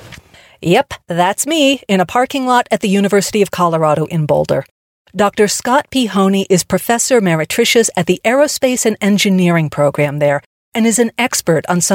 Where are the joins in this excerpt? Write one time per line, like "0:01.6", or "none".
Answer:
none